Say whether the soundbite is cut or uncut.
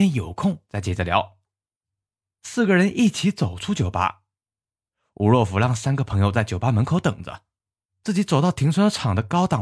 uncut